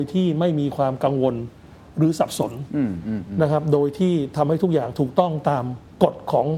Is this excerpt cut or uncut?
uncut